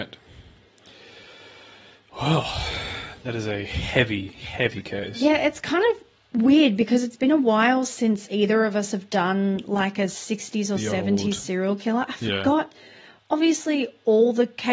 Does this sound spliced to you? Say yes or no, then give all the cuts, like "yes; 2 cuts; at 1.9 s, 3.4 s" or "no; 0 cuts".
no; 0 cuts